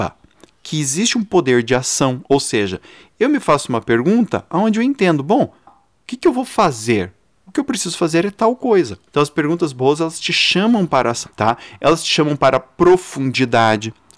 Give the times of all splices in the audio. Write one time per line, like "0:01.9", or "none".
0:05.7
0:09.1
0:11.3